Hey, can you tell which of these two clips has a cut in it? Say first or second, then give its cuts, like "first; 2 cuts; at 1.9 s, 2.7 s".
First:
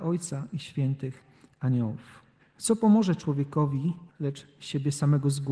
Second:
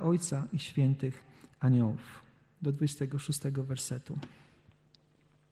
first; 2 cuts; at 2.4 s, 4.1 s